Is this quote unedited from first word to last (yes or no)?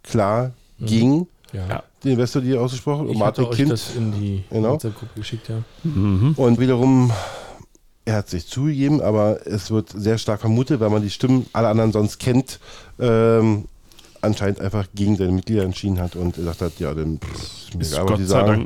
no